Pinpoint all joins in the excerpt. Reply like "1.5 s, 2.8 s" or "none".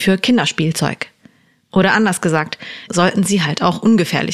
2.9 s